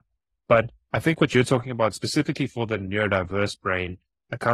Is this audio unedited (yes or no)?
yes